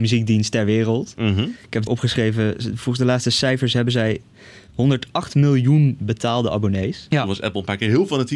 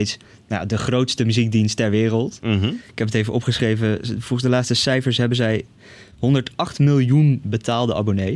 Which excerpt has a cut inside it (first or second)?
first